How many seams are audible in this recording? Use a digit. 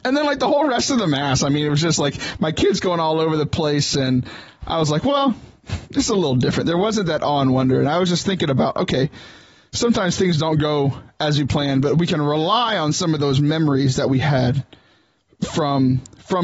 0